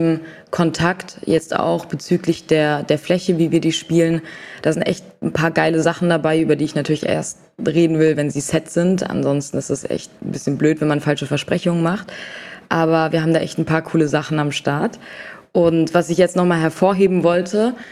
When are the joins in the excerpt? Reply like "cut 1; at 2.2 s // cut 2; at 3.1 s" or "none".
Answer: none